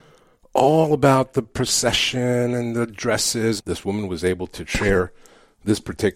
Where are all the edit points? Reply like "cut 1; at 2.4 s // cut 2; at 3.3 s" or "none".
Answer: cut 1; at 3.6 s

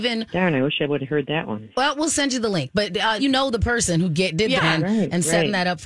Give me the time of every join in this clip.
cut 1; at 3.2 s // cut 2; at 4.6 s

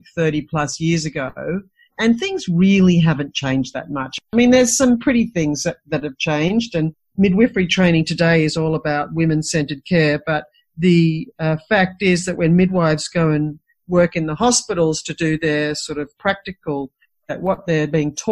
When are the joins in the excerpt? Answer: none

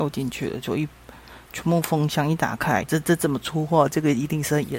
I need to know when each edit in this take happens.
cut 1; at 2.8 s

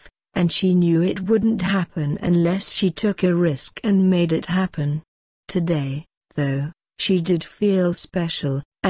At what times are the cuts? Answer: none

